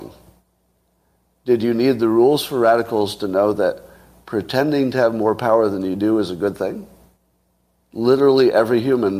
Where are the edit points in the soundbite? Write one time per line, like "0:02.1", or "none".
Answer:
0:07.8